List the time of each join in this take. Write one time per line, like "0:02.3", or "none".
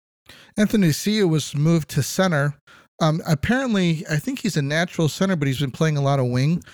none